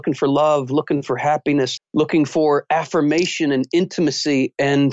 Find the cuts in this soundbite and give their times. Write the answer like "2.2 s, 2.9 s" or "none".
1.8 s